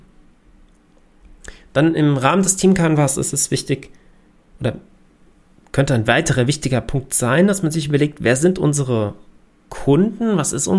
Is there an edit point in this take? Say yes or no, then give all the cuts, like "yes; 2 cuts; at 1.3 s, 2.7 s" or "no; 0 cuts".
no; 0 cuts